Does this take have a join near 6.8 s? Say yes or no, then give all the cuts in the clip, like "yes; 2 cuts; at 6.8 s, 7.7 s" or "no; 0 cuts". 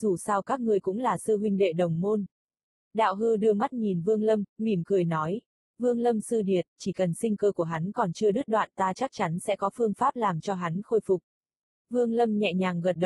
yes; 2 cuts; at 2.8 s, 6.8 s